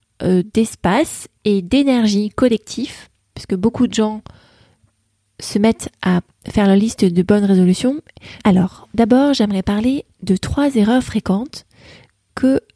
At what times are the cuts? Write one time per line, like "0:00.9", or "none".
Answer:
0:08.4
0:10.1